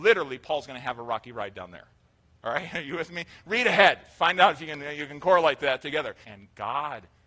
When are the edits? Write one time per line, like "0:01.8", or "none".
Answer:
0:06.2